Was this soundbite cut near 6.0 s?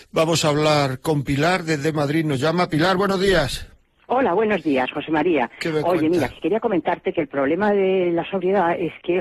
no; 0 cuts

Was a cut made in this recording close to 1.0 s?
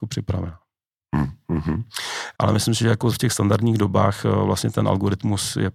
no; 1 cut; at 2.3 s

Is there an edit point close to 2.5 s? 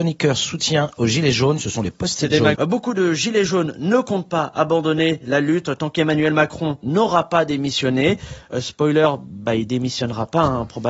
yes; 1 cut; at 2.5 s

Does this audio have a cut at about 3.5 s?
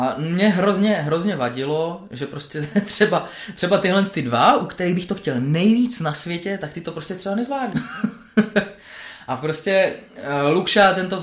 no; 1 cut; at 7.7 s

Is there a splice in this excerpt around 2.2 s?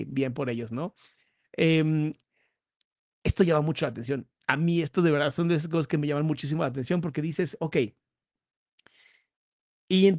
no; 0 cuts

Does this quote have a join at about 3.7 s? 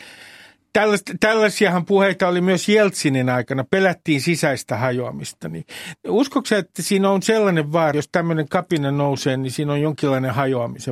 no; 1 cut; at 7.9 s

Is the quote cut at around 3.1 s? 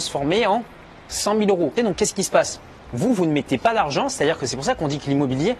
no; 1 cut; at 1.8 s

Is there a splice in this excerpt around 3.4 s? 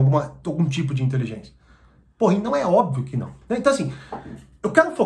yes; 1 cut; at 3.4 s

